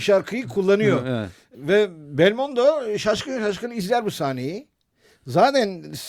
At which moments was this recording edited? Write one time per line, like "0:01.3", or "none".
0:01.5